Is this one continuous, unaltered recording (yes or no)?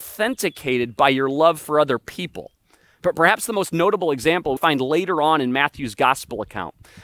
no